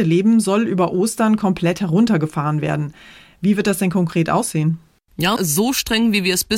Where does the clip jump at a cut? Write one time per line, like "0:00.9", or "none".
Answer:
0:05.4